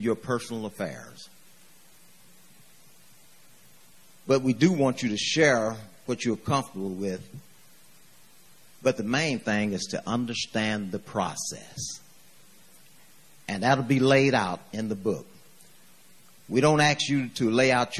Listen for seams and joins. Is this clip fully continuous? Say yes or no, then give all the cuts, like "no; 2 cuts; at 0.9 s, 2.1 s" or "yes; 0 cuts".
yes; 0 cuts